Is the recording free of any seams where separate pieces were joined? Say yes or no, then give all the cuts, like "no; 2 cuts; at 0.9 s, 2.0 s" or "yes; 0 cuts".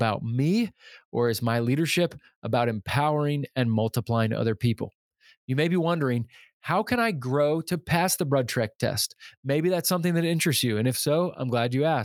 yes; 0 cuts